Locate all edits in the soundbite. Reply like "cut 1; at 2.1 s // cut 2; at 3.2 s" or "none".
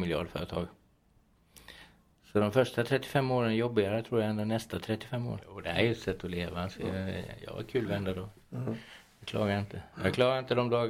none